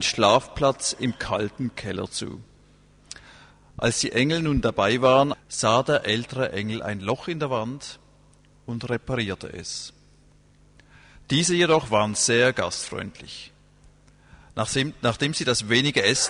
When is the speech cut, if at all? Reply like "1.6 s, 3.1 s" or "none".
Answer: 5.3 s, 11.2 s